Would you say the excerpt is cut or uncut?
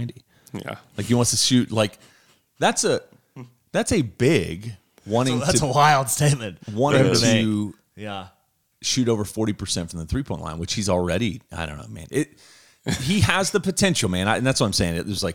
uncut